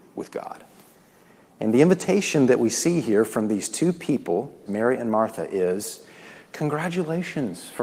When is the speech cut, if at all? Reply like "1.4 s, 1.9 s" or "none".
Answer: 4.7 s